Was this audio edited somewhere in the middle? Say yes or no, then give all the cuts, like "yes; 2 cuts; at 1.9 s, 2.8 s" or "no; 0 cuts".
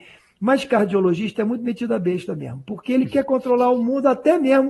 no; 0 cuts